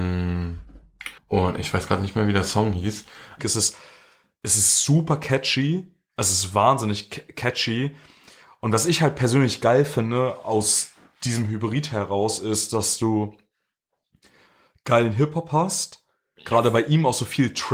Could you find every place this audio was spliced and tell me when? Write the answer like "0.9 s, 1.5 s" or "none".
1.2 s, 3.4 s